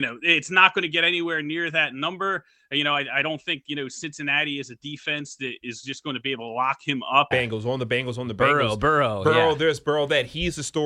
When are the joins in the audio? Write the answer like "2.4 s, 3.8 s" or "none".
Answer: 7.3 s